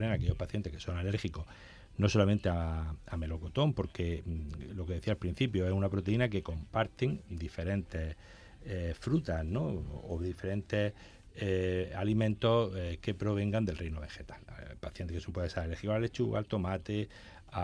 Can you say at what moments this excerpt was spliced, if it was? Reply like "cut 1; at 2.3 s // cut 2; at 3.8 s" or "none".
none